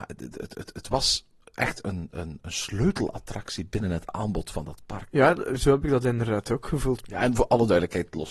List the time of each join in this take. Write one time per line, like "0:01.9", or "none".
0:05.1
0:07.0